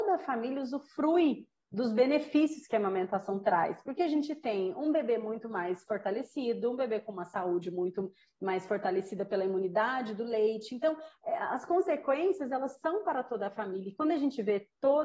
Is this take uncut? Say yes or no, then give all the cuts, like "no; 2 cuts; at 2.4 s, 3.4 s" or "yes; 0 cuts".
yes; 0 cuts